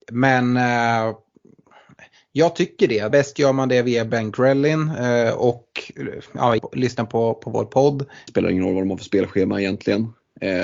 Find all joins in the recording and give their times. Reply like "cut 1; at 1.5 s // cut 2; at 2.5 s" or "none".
cut 1; at 3.1 s // cut 2; at 6.6 s // cut 3; at 8.3 s